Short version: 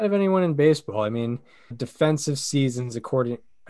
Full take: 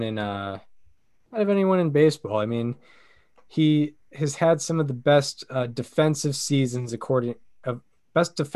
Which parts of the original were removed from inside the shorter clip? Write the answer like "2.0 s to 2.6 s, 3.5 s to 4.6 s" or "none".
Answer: 3.1 s to 5.7 s